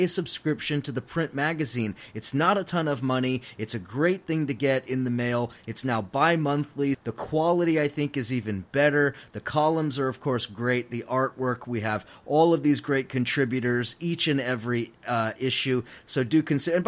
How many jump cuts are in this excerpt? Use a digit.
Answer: 1